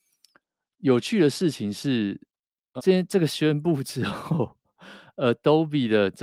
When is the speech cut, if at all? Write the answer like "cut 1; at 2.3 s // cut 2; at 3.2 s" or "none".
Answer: cut 1; at 2.8 s